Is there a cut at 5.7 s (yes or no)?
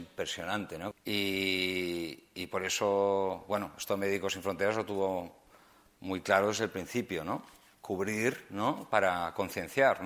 no